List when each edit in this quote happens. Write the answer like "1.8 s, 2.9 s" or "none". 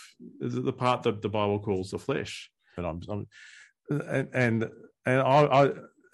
2.8 s

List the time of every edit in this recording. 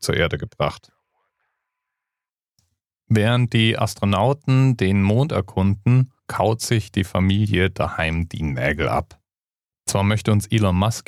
9.7 s

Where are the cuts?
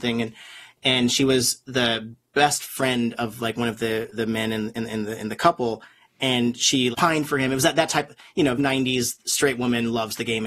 6.9 s, 8.6 s

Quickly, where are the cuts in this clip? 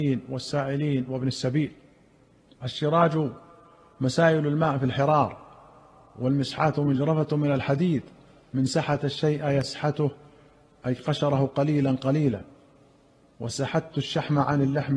none

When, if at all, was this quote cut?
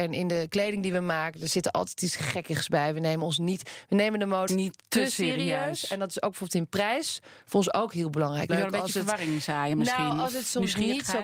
4.5 s, 8.5 s

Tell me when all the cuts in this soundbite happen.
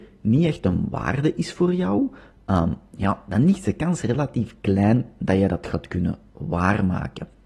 none

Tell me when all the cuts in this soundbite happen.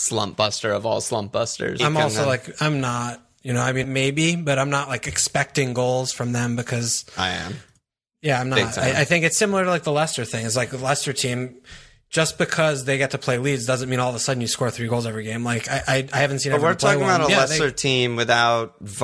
1.8 s, 3.8 s

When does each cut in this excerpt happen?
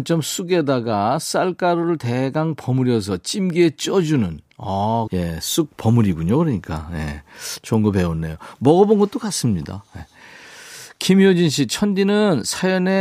5.1 s

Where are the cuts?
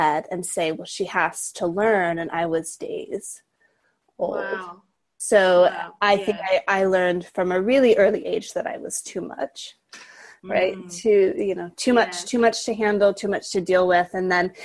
2.8 s

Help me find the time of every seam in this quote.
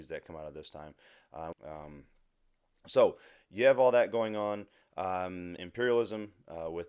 1.5 s, 5.6 s

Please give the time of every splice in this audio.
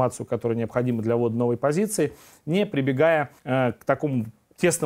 3.4 s

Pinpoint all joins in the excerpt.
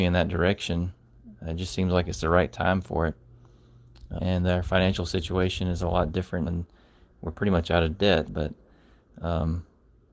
4.2 s, 6.5 s, 8.3 s

